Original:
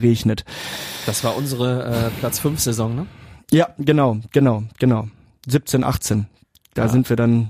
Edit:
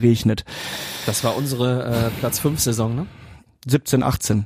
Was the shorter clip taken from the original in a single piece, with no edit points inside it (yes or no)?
no